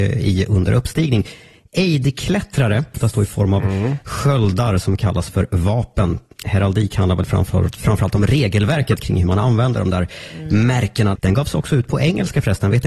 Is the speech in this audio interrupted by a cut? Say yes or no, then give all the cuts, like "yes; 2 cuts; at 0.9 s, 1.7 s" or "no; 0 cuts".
yes; 2 cuts; at 2.9 s, 11.2 s